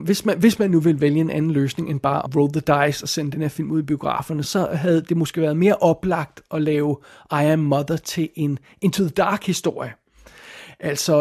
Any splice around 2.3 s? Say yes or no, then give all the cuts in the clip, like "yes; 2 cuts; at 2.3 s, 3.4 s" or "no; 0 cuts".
yes; 2 cuts; at 2.3 s, 4.4 s